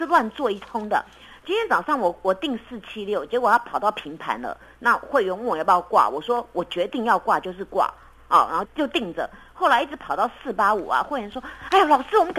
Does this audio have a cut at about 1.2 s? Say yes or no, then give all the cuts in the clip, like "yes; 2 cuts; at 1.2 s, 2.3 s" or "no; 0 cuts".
no; 1 cut; at 8.6 s